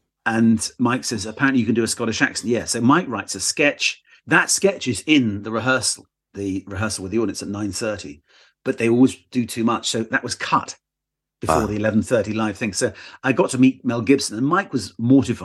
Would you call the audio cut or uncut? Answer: uncut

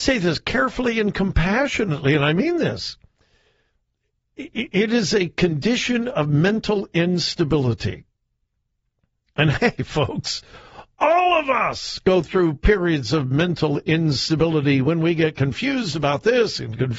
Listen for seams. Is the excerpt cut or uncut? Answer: uncut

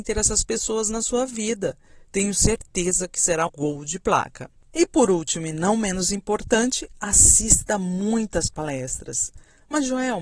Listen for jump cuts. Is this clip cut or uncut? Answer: cut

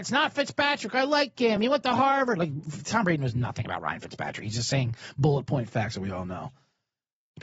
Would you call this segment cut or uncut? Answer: uncut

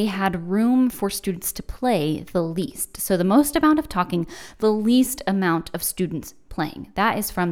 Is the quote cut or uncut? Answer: uncut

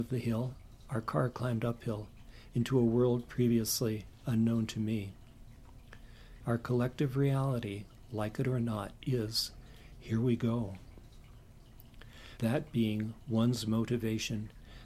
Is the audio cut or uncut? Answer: cut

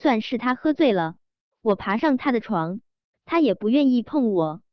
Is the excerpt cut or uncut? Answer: uncut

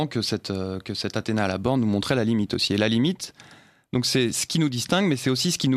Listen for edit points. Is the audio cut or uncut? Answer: uncut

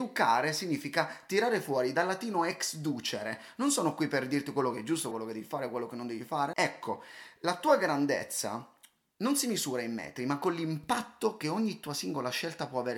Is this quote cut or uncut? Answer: cut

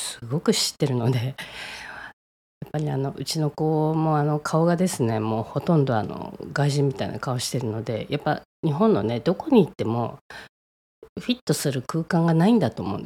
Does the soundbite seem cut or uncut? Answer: uncut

